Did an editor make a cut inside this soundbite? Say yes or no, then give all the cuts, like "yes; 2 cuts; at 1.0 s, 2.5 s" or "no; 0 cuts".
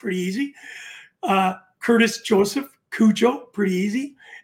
no; 0 cuts